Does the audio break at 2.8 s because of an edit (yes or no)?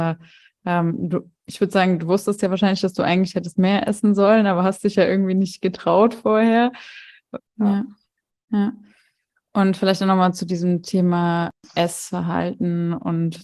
no